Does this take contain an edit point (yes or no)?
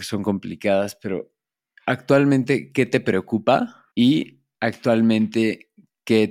yes